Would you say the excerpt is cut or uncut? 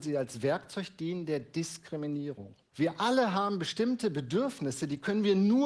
cut